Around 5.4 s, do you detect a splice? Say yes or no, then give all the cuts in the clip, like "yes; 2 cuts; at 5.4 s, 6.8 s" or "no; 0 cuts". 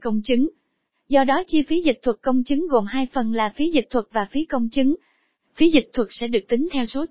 no; 0 cuts